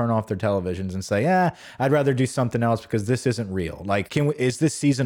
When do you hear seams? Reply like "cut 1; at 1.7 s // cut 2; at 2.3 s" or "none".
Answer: cut 1; at 4.1 s